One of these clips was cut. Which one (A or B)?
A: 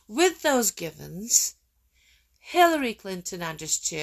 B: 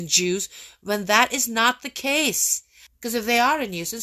B